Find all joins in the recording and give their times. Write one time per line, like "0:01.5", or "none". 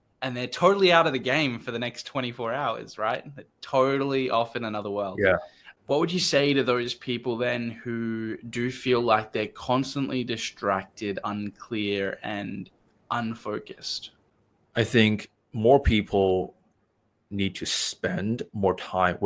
none